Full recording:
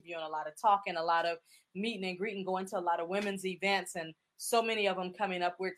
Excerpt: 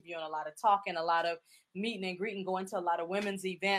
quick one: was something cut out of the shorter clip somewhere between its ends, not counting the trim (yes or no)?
no